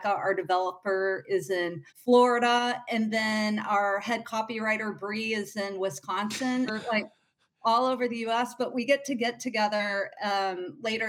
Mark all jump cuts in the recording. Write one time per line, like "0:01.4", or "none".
0:01.9
0:06.7